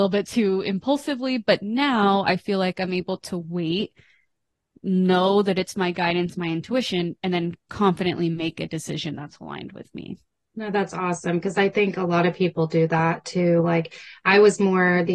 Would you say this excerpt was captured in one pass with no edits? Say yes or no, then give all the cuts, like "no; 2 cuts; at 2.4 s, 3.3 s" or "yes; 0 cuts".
yes; 0 cuts